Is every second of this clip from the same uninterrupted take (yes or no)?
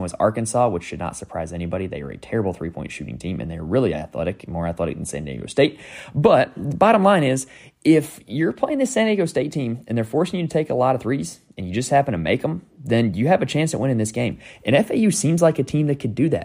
yes